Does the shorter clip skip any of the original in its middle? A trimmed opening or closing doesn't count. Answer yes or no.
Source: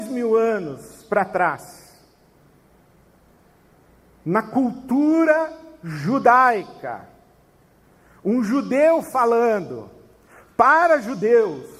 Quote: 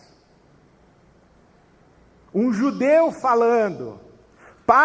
yes